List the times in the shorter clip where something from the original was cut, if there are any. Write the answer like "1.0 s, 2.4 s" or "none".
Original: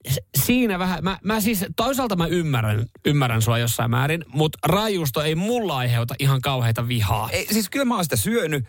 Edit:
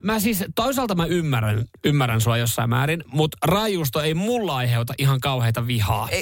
none